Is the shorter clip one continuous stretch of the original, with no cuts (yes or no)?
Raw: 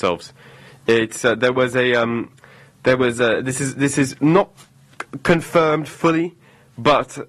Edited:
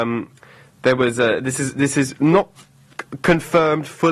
yes